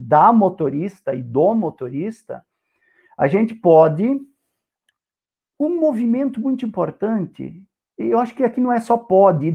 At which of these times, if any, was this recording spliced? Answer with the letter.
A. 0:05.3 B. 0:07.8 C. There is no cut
C